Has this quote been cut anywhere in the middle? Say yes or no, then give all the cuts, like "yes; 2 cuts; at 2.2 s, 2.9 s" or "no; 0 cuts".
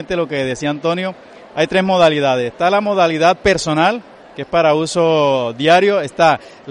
yes; 1 cut; at 4.2 s